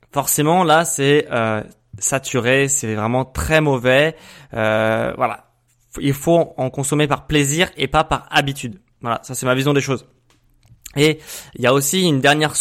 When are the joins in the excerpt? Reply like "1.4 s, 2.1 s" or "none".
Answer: none